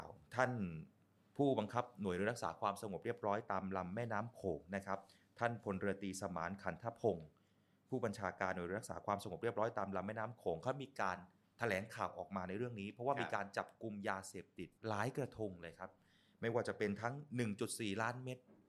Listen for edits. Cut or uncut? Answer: cut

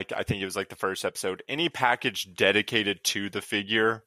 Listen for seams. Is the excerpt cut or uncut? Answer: uncut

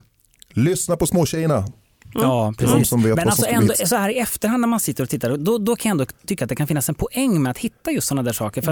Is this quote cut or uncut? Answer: uncut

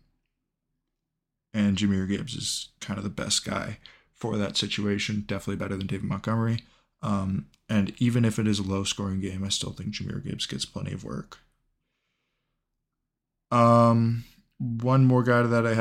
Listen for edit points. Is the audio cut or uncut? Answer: uncut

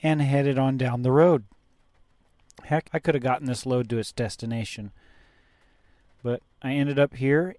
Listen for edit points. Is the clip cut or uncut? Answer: cut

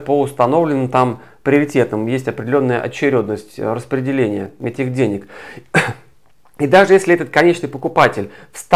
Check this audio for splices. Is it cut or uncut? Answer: uncut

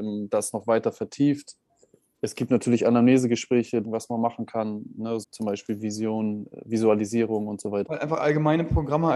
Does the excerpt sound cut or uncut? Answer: cut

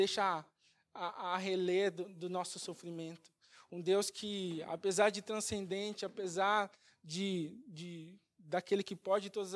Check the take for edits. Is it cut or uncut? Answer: uncut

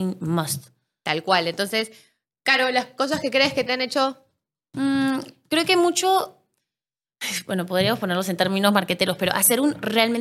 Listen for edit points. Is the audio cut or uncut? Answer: uncut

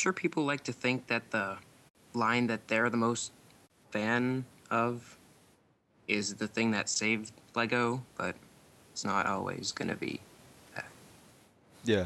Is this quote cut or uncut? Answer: uncut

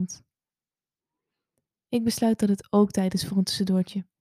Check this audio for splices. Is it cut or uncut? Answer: uncut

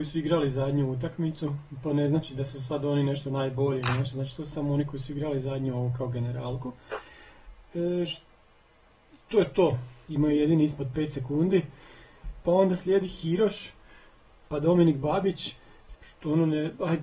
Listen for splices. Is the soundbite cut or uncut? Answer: cut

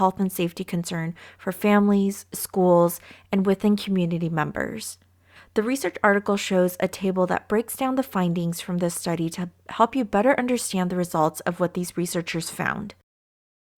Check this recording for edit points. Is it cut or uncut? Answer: cut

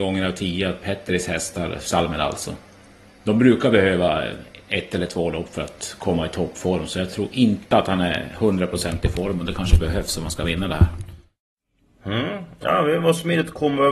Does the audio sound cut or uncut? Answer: uncut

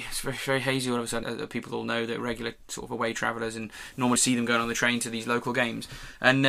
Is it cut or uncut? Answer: cut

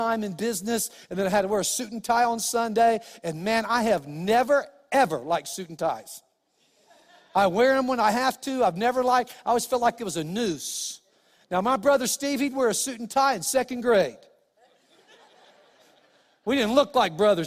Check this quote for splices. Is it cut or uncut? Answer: uncut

